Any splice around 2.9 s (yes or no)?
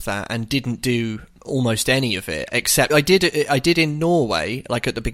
yes